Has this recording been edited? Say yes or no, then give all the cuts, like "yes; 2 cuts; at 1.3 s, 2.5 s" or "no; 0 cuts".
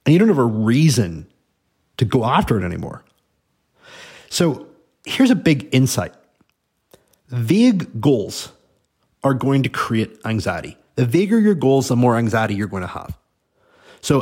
no; 0 cuts